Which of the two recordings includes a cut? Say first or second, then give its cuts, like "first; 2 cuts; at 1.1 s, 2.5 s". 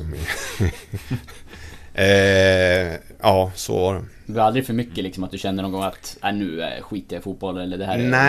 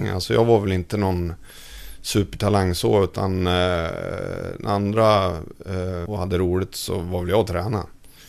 second; 1 cut; at 6.1 s